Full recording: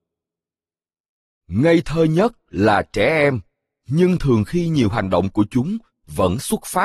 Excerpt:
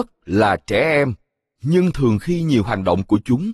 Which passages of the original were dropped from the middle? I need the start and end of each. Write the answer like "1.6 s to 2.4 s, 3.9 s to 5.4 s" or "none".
none